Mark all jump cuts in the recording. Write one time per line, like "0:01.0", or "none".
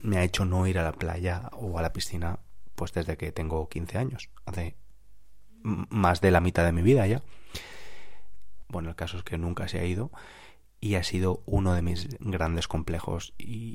0:08.6